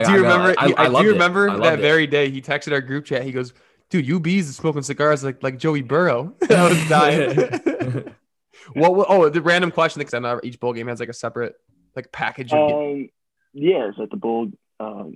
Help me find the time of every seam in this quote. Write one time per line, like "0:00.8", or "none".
0:10.1
0:14.0